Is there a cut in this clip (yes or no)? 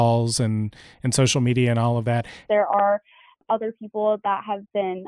yes